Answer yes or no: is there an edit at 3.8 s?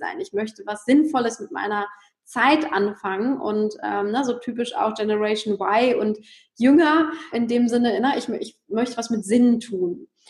no